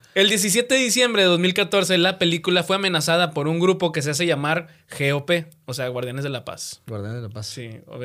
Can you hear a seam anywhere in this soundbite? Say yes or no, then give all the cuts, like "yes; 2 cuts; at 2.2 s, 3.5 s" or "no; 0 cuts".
no; 0 cuts